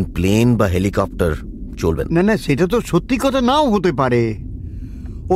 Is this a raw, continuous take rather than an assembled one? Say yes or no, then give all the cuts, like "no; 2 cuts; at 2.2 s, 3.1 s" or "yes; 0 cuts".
no; 1 cut; at 2.1 s